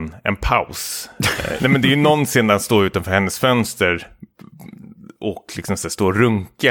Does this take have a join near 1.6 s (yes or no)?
yes